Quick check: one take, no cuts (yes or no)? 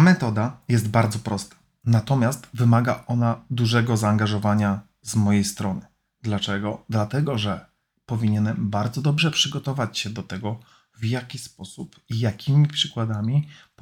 yes